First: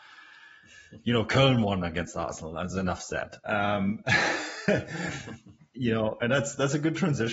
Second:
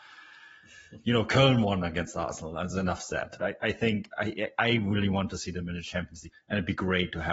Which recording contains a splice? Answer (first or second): second